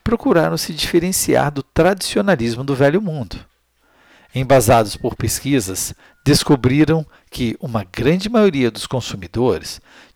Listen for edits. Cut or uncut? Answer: uncut